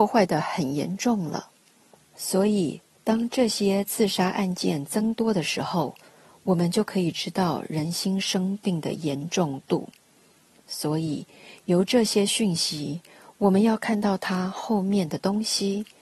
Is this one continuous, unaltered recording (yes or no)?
yes